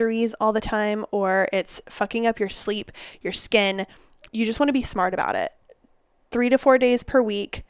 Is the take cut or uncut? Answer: cut